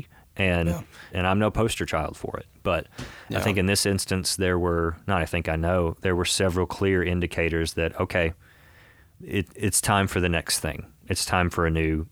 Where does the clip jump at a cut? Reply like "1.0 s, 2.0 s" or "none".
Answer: 1.1 s